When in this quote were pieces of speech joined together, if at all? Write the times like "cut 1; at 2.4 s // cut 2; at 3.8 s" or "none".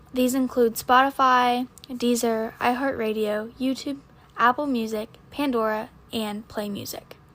none